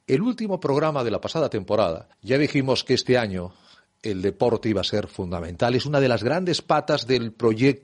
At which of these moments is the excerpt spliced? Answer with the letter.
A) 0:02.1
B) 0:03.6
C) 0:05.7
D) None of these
A